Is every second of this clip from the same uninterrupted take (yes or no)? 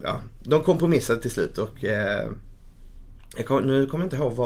yes